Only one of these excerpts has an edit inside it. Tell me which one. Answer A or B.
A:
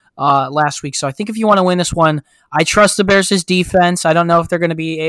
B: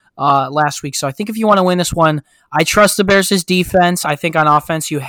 B